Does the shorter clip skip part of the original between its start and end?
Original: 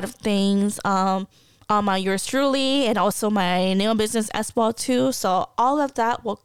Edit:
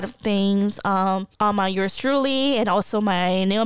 yes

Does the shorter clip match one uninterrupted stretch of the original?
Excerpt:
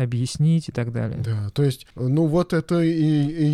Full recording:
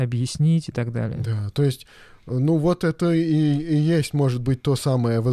no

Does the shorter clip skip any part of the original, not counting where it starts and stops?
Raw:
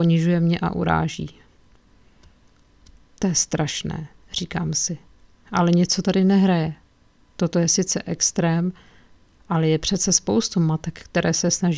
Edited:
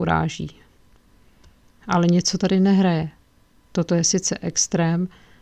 yes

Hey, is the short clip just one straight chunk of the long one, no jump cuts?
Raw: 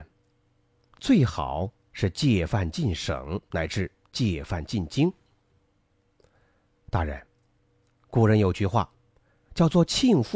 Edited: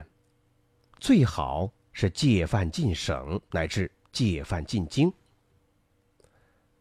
yes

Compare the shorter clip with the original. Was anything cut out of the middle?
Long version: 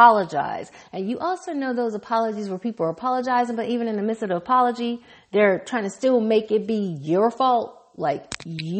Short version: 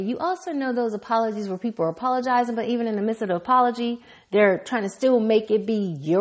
no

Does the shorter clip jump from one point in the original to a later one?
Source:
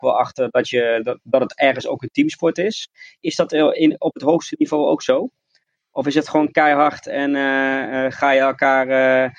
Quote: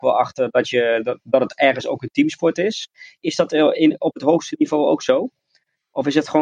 no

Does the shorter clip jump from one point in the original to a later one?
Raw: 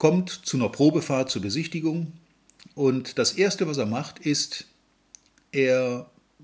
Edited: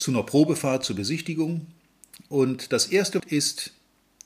yes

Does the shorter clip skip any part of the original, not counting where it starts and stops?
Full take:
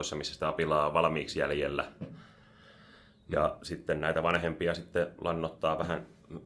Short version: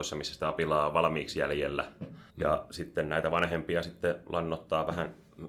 yes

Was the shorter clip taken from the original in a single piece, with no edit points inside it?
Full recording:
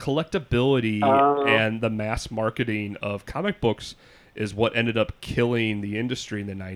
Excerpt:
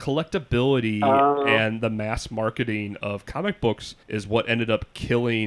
no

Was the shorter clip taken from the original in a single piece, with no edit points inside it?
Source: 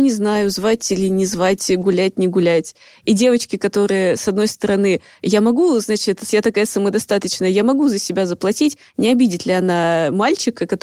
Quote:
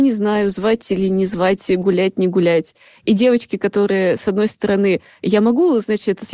yes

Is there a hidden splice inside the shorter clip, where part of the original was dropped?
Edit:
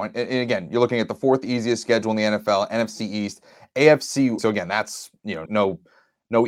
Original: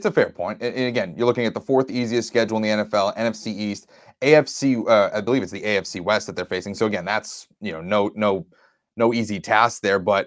yes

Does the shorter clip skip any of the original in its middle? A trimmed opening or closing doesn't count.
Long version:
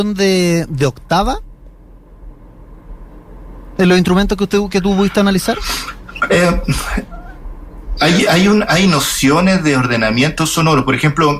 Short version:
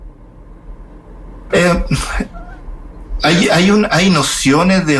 yes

